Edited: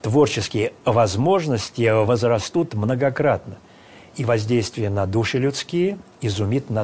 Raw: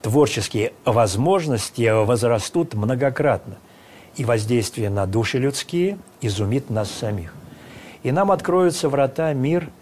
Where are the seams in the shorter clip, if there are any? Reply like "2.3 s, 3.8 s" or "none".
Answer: none